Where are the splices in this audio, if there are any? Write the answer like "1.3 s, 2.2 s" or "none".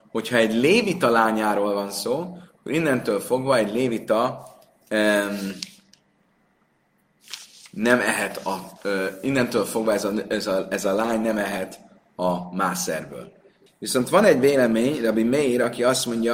13.7 s